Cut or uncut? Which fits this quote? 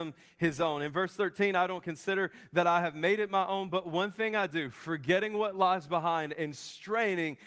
uncut